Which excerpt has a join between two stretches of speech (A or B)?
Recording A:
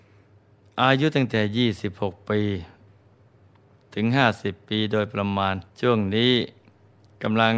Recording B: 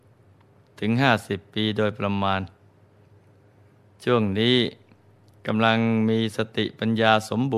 A